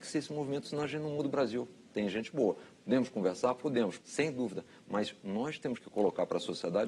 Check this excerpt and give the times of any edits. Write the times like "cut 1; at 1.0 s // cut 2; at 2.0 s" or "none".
cut 1; at 1.9 s // cut 2; at 4.0 s